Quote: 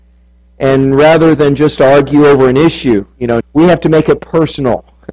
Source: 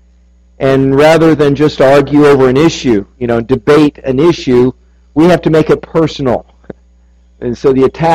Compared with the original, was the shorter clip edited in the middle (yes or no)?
yes